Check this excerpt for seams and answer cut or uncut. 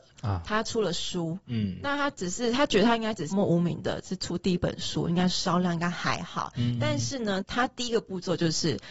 cut